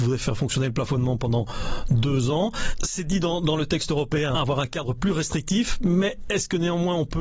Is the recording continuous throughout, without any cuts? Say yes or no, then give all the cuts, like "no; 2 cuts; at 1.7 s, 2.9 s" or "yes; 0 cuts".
no; 1 cut; at 4.3 s